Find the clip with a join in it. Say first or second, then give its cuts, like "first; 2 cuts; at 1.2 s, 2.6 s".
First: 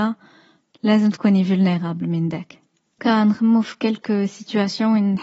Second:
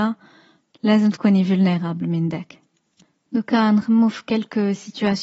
first; 1 cut; at 3.0 s